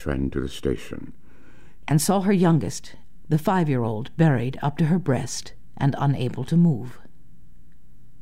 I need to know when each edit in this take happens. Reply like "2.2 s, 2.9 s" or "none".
1.8 s, 3.2 s